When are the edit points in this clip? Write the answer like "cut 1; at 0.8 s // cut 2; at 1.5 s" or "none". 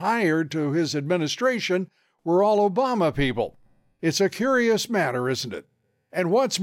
none